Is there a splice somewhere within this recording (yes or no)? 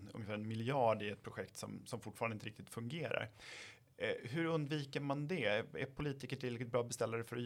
no